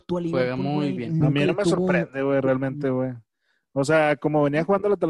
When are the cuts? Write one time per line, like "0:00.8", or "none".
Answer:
0:01.2